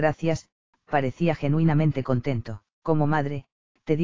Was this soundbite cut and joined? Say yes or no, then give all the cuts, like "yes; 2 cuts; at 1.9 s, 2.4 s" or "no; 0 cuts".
yes; 1 cut; at 2.8 s